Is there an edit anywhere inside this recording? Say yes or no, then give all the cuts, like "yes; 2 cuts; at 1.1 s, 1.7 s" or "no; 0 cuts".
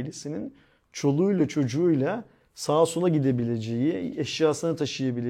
no; 0 cuts